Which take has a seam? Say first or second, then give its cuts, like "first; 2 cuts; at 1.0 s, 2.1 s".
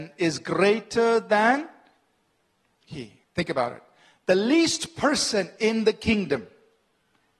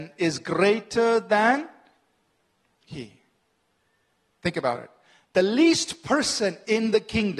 first; 1 cut; at 3.2 s